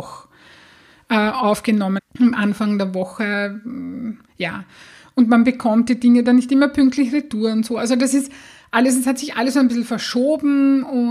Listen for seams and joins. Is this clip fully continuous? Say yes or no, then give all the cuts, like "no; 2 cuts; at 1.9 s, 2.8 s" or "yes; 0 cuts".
no; 1 cut; at 2.0 s